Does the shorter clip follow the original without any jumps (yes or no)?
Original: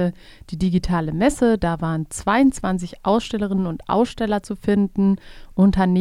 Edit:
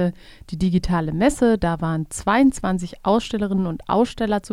yes